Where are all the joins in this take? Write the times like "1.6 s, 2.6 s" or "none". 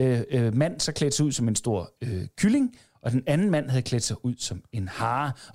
none